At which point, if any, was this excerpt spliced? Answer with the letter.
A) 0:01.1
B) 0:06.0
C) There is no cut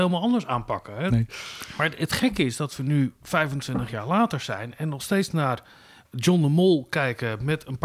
A